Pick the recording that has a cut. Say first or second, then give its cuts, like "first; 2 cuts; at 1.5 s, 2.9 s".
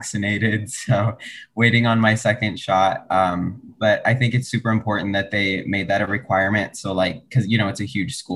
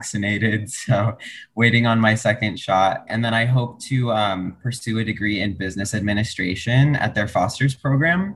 second; 1 cut; at 3.1 s